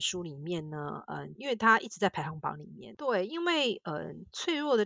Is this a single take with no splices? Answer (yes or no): no